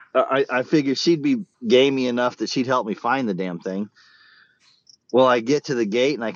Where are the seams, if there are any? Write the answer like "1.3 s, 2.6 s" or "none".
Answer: 1.5 s